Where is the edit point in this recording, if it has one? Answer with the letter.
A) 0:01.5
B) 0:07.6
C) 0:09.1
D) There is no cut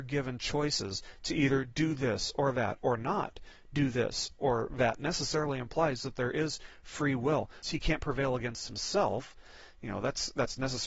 B